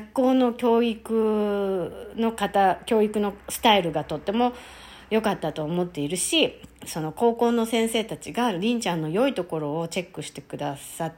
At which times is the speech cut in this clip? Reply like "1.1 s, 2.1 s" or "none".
6.7 s